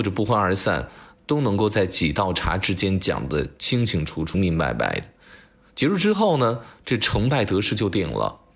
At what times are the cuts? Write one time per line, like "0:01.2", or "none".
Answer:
0:04.3